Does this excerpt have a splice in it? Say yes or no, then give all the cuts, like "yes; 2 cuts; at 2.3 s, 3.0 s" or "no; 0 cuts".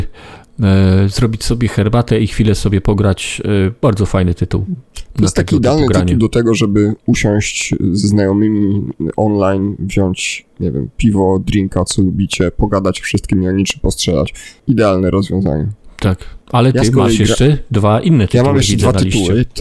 no; 0 cuts